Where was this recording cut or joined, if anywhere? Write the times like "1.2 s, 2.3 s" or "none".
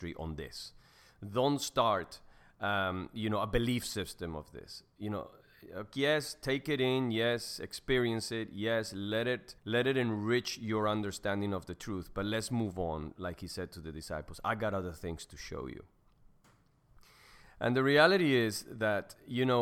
9.6 s